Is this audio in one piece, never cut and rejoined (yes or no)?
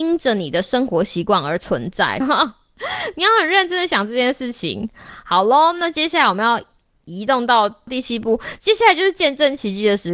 yes